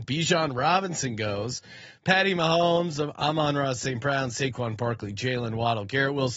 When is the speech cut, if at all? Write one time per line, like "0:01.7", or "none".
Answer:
none